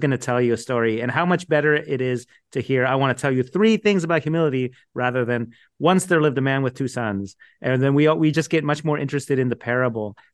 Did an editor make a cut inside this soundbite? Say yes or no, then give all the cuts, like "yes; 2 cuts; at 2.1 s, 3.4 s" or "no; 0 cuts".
no; 0 cuts